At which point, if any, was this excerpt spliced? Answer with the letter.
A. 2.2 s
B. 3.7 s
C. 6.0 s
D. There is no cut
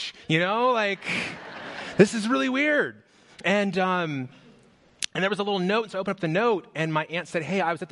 D